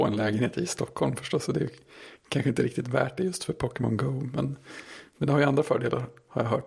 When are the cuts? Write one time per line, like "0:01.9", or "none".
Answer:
none